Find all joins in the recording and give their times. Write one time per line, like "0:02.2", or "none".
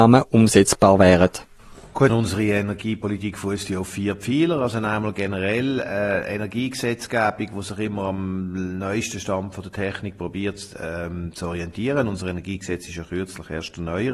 0:02.1